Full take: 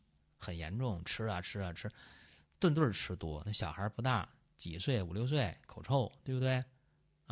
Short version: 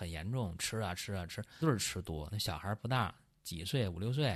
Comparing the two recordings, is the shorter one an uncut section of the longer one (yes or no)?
no